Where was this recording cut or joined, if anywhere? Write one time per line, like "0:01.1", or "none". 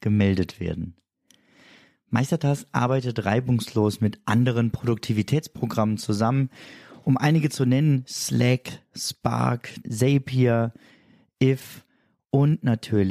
0:09.8